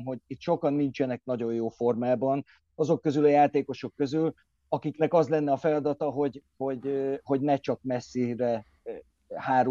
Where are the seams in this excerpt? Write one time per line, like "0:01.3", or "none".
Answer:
none